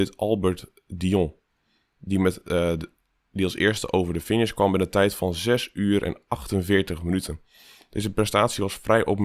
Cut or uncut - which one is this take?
uncut